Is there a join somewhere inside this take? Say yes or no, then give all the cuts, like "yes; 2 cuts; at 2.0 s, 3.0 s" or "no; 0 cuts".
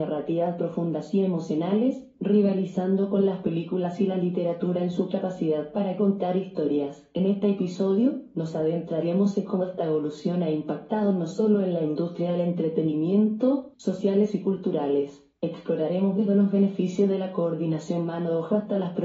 yes; 1 cut; at 13.7 s